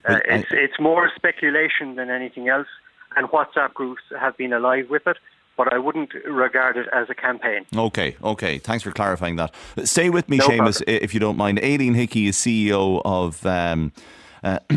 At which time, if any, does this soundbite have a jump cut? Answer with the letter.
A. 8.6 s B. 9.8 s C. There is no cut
C